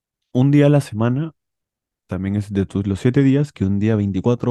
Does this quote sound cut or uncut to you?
uncut